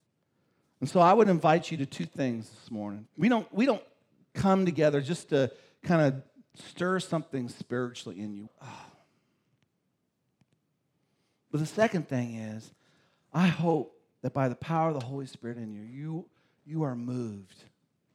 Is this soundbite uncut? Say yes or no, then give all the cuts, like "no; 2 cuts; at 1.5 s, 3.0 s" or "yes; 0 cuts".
no; 2 cuts; at 3.1 s, 8.5 s